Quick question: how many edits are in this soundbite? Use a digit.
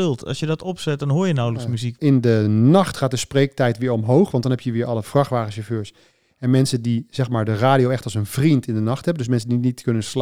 1